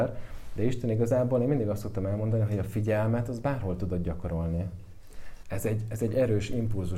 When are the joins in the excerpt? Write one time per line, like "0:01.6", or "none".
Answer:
0:05.4